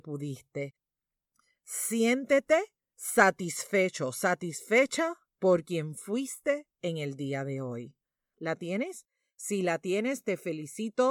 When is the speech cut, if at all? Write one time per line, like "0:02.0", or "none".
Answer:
0:08.3

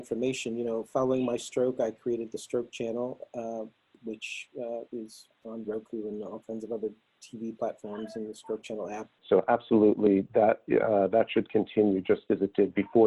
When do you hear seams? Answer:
0:09.2

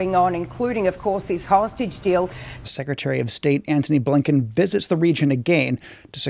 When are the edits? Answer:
0:02.6

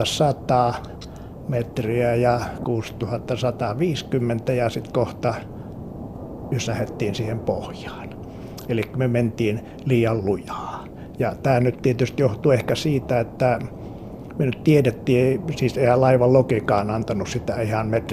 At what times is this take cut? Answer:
none

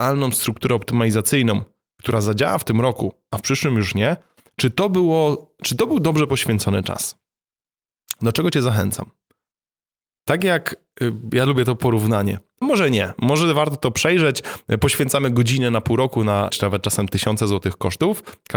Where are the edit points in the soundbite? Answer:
0:12.6
0:16.5

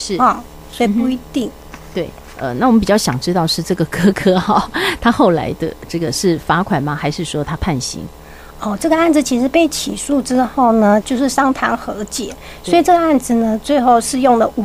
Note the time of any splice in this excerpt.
0:07.6
0:11.0

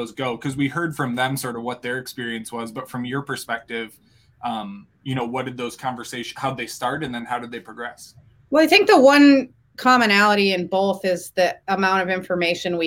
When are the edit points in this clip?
none

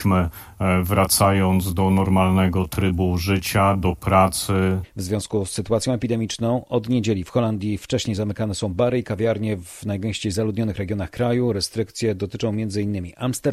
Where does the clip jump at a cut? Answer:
0:04.8

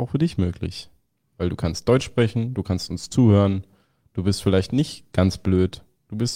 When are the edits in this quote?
none

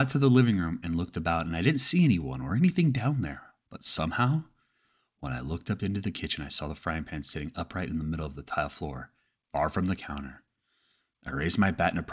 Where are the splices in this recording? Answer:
none

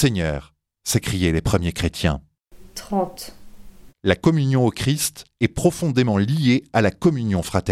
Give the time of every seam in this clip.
0:03.9

